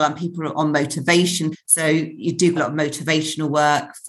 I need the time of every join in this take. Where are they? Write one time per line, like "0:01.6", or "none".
0:01.5
0:02.6